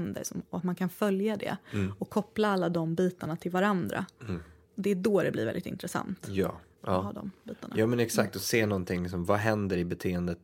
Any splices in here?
yes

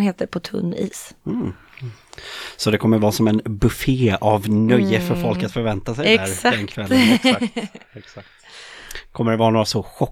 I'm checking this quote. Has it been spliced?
no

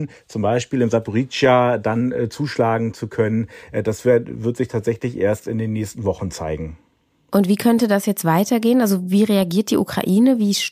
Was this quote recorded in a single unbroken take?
yes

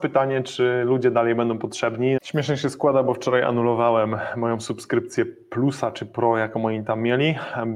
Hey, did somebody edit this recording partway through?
yes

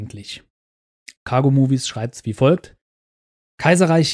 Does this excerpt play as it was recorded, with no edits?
yes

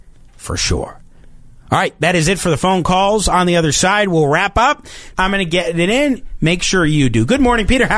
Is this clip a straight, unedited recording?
no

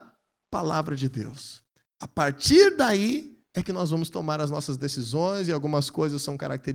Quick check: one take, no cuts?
yes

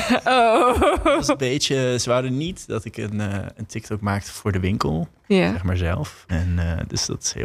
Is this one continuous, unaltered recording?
no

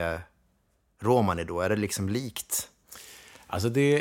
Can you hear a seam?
no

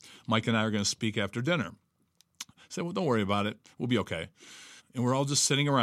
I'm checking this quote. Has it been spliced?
yes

